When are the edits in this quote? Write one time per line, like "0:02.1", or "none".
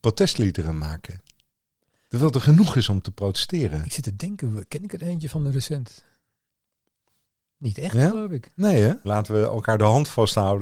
0:09.0